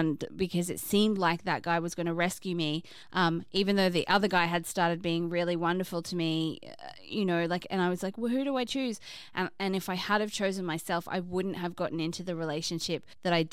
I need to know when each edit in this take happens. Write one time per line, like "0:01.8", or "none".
none